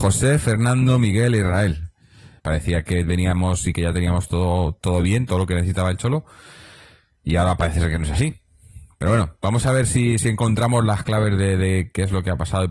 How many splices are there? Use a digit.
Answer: 1